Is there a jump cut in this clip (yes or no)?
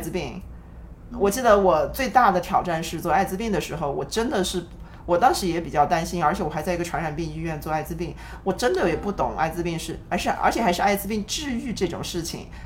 yes